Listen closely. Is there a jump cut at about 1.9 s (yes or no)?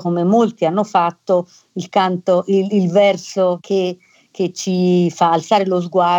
no